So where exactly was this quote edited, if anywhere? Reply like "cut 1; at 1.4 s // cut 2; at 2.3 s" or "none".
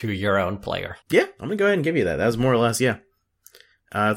cut 1; at 1.0 s